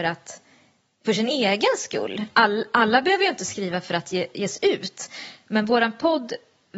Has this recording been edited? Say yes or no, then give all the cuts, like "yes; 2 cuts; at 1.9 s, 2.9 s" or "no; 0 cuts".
no; 0 cuts